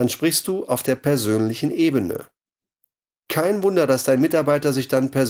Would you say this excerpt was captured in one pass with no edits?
yes; 0 cuts

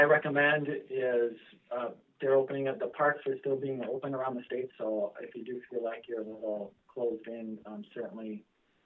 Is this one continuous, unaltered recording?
yes; 0 cuts

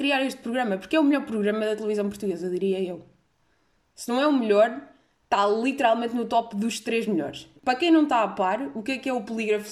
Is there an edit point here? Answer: yes; 1 cut; at 7.6 s

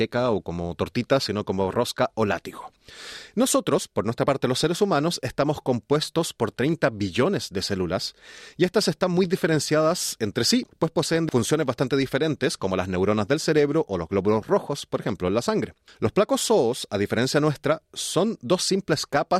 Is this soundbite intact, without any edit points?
yes; 0 cuts

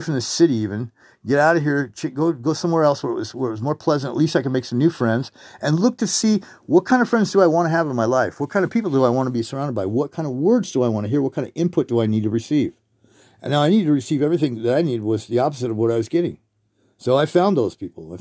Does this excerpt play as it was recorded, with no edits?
yes; 0 cuts

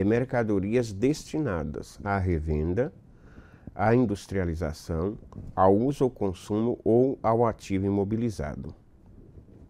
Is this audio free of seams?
yes; 0 cuts

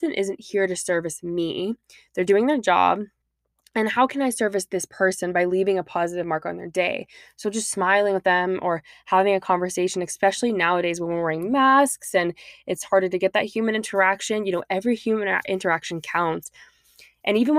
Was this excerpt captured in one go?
yes; 0 cuts

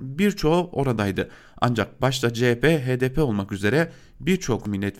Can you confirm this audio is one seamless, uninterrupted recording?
yes; 0 cuts

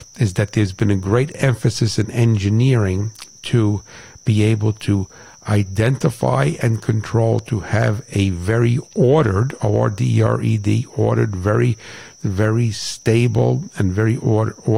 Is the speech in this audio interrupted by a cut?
no; 0 cuts

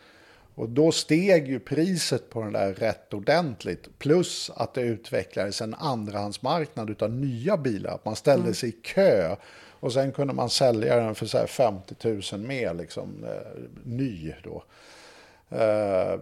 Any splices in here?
no; 0 cuts

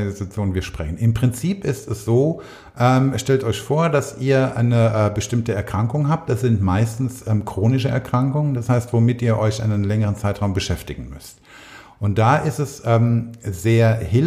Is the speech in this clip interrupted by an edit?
no; 0 cuts

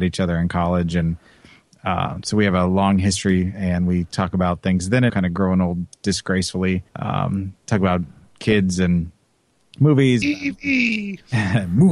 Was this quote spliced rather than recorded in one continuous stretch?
yes; 3 cuts; at 5.1 s, 6.9 s, 10.2 s

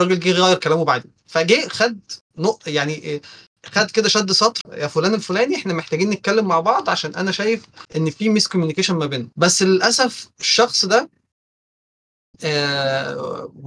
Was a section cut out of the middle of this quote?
yes; 3 cuts; at 4.6 s, 7.9 s, 9.3 s

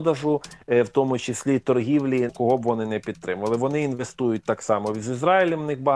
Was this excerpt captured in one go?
no; 1 cut; at 2.3 s

